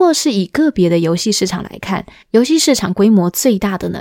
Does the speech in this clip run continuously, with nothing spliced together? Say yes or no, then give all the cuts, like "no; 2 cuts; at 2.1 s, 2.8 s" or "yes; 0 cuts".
yes; 0 cuts